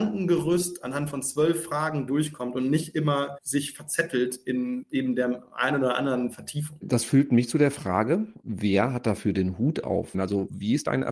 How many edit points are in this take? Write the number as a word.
one